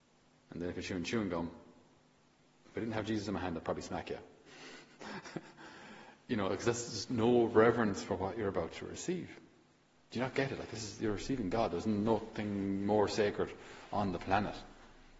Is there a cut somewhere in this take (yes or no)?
no